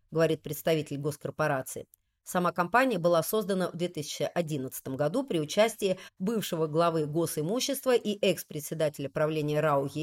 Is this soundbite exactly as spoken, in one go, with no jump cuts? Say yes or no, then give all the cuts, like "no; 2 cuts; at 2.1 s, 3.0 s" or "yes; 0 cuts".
yes; 0 cuts